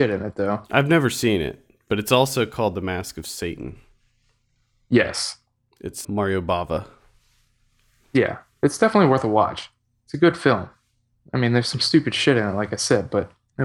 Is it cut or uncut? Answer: cut